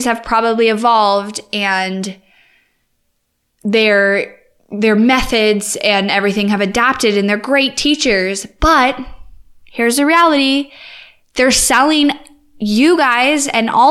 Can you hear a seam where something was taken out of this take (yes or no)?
no